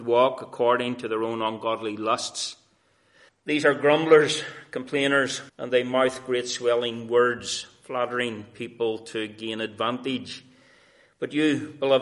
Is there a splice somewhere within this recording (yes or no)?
yes